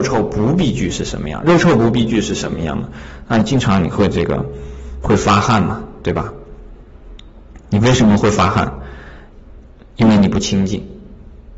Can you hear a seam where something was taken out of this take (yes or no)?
no